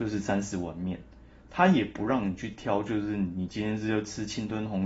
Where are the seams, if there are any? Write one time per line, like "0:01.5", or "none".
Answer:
none

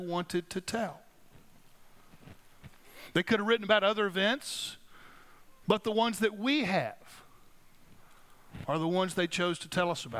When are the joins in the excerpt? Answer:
0:05.6

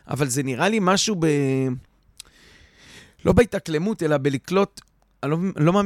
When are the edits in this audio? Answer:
none

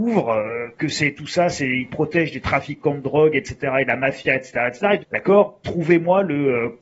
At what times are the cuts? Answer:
0:05.0

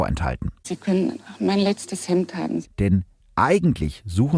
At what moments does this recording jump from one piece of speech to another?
0:02.6

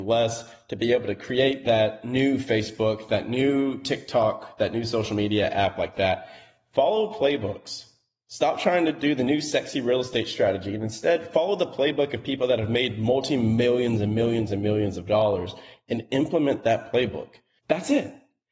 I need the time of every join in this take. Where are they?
0:17.6

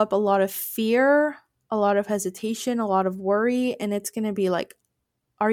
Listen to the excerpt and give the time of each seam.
none

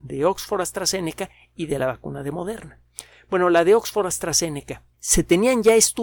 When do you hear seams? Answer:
0:04.9

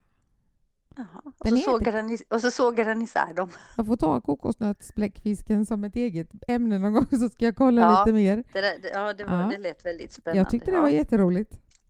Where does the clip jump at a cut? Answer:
none

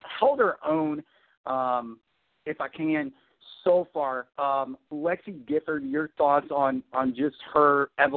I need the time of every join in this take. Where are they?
none

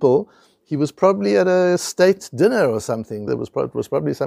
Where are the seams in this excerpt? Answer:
0:03.3

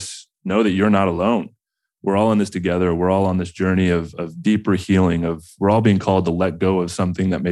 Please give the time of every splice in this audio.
none

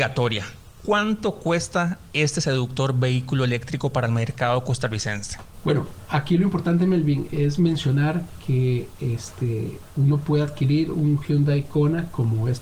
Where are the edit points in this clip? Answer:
none

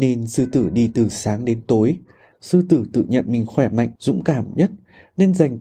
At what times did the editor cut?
0:02.3
0:04.0

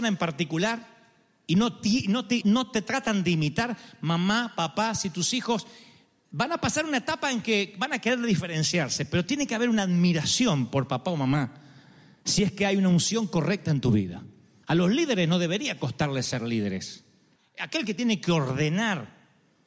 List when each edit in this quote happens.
0:02.4
0:14.6

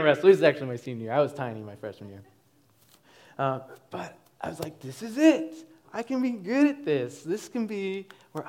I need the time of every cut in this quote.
0:05.8

